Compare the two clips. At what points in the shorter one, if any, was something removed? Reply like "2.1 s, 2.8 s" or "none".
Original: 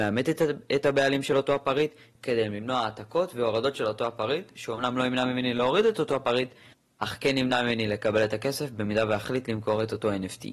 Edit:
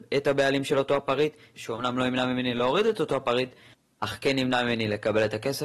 1.5 s